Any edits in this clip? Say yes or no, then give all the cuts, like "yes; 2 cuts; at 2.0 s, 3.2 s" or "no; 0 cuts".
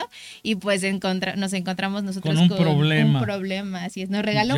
no; 0 cuts